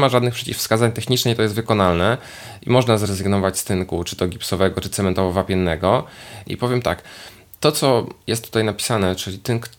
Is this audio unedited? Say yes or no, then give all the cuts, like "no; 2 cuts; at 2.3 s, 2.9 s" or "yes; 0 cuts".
no; 1 cut; at 6.4 s